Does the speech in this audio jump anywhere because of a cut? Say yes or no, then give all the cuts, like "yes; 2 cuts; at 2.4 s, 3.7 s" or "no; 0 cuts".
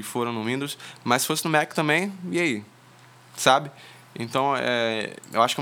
no; 0 cuts